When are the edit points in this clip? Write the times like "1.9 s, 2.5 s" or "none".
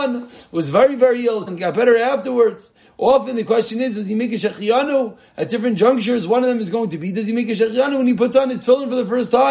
1.5 s